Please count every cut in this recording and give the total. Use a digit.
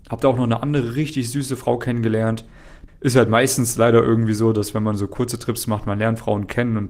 1